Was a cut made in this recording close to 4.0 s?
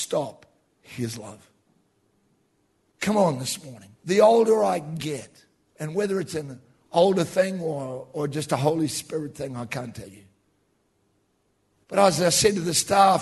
yes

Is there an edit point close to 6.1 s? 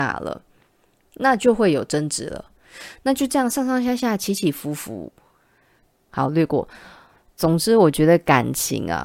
yes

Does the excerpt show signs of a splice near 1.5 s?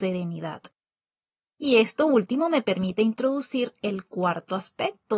yes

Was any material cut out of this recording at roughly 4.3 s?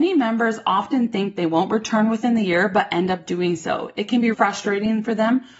yes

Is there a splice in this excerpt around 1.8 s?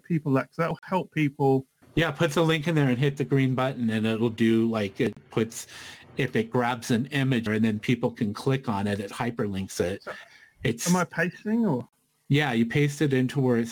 yes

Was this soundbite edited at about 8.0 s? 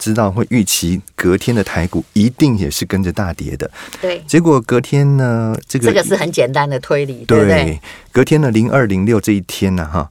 no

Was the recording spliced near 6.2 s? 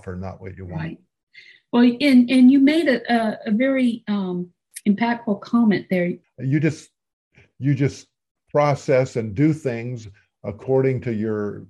yes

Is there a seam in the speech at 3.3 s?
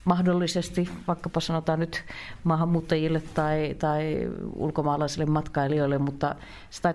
no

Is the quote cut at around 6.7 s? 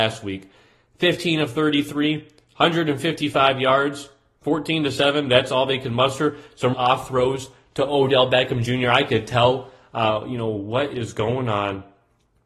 yes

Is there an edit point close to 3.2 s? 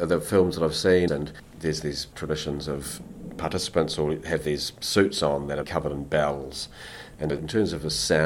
no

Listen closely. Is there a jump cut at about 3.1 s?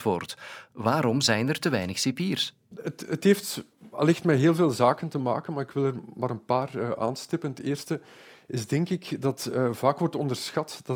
no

